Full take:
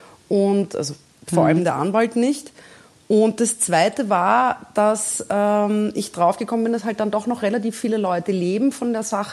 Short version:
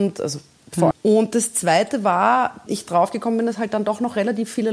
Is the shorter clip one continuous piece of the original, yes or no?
no